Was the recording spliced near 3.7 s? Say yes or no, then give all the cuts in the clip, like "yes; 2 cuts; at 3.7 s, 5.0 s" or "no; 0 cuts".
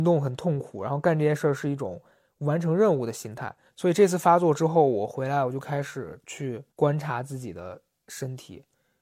yes; 2 cuts; at 3.7 s, 6.7 s